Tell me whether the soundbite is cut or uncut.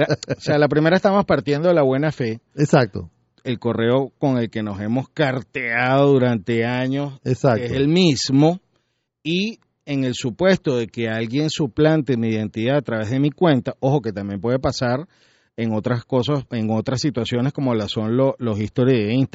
cut